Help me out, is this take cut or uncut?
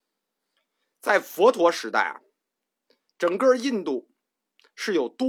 uncut